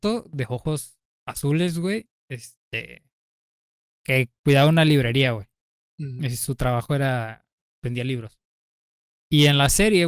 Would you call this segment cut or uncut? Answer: uncut